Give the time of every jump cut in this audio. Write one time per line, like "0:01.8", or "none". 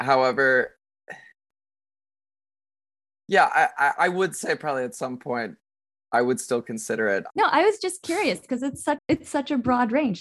0:07.3
0:09.0